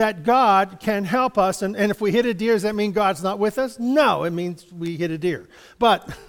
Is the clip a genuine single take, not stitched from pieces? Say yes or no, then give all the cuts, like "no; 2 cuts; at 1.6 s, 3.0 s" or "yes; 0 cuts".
yes; 0 cuts